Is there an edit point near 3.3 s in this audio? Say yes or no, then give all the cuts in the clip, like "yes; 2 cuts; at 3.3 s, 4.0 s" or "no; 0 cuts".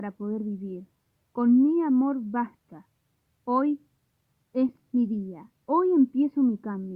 yes; 1 cut; at 3.3 s